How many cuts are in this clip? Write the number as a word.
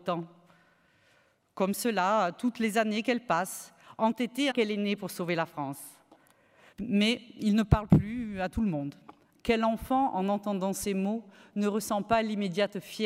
three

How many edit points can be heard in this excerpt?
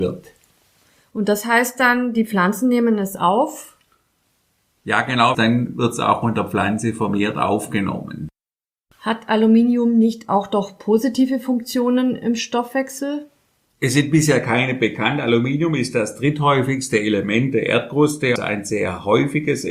two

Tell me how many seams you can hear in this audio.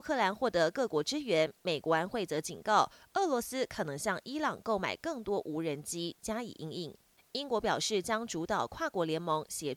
two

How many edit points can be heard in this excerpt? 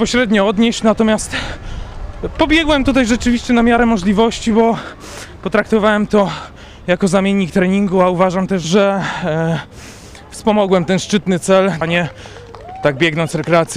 two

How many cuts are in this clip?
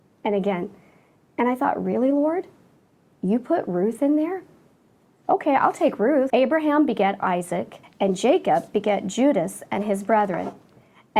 two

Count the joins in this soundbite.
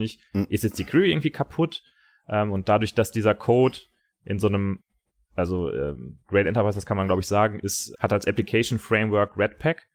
one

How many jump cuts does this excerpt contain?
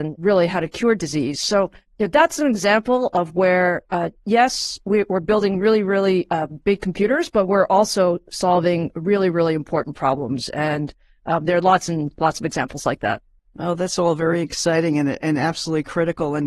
zero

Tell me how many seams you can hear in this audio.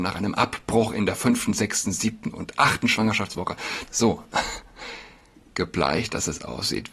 one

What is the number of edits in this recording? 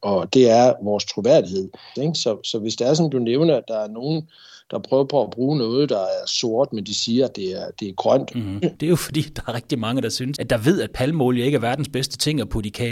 three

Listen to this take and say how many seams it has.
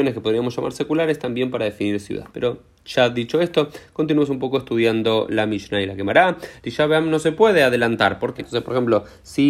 three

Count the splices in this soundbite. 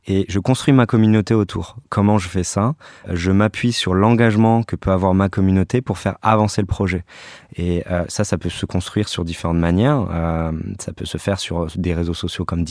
zero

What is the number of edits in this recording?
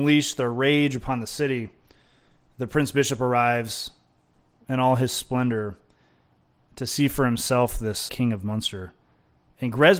one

